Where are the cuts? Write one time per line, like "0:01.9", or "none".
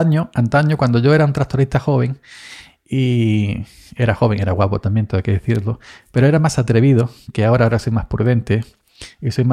none